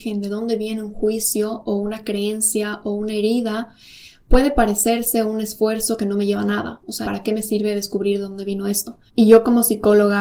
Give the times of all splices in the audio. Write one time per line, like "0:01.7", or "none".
0:07.0
0:09.1